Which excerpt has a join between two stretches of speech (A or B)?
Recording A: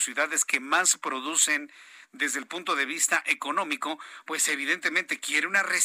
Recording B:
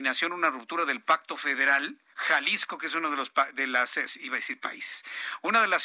B